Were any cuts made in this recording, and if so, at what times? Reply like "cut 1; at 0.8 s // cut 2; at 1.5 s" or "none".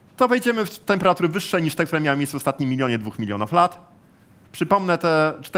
cut 1; at 4.4 s